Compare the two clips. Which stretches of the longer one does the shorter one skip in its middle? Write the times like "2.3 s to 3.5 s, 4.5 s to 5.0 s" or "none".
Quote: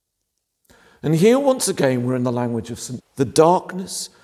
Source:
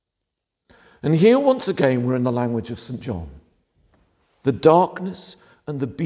3.0 s to 4.3 s